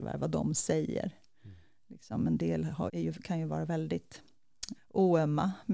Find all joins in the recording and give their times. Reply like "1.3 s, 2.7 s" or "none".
2.9 s, 4.7 s